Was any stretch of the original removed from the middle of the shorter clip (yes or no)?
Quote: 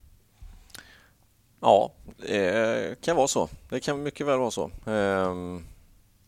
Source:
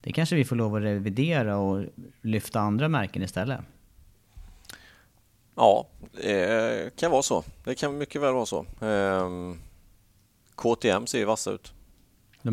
no